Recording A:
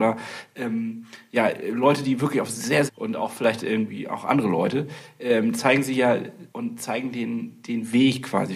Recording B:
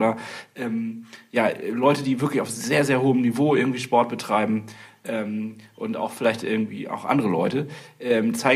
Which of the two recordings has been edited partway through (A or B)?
A